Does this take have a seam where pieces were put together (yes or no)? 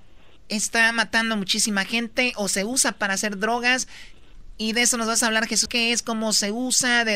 yes